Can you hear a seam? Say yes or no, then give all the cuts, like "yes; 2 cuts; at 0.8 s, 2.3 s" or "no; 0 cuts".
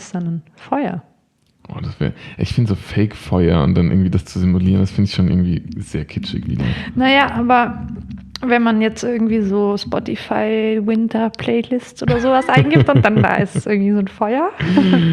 no; 0 cuts